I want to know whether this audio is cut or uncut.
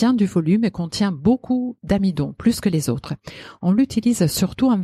uncut